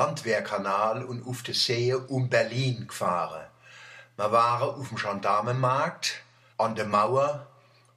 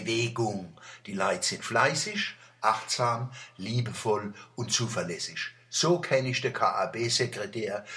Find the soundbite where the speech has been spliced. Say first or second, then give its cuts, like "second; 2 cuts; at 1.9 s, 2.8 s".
first; 1 cut; at 6.5 s